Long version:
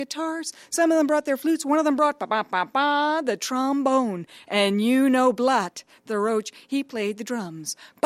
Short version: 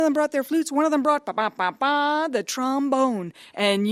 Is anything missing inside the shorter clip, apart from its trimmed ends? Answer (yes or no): no